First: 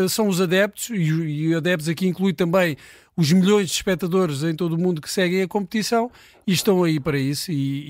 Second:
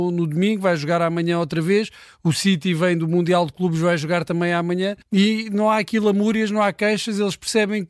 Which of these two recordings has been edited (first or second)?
second